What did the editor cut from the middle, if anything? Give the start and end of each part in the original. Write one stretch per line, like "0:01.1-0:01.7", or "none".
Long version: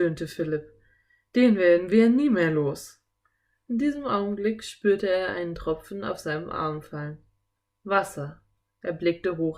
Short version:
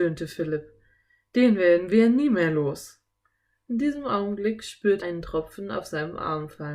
0:05.0-0:05.3